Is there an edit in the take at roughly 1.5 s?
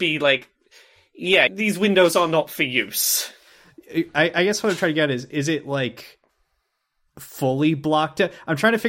yes; 1 cut; at 1.5 s

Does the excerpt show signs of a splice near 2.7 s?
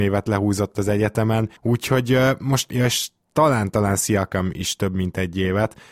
yes; 2 cuts; at 1.6 s, 2.7 s

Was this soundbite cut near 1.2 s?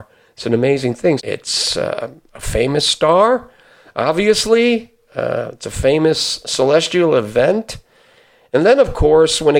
yes; 1 cut; at 1.2 s

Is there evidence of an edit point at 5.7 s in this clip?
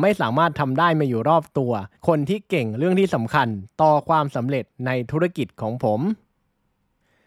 no; 1 cut; at 2.0 s

